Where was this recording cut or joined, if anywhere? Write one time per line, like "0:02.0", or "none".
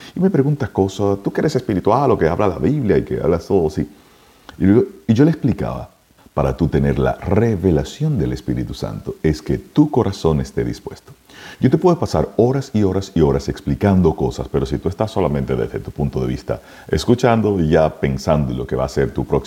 0:06.2